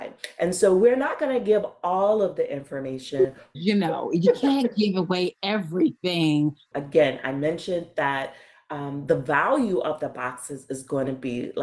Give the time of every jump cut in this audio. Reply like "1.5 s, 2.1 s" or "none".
3.5 s, 6.7 s